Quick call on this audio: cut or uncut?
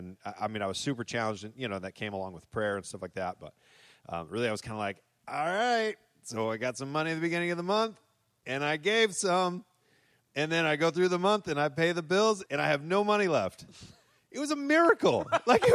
cut